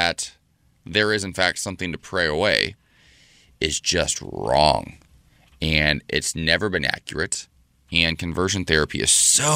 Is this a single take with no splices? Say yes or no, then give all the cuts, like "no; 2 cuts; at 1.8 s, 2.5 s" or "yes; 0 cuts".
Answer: yes; 0 cuts